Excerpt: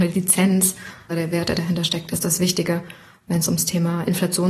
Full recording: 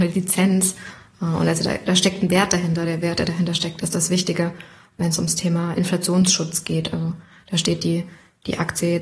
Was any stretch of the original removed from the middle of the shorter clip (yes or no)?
yes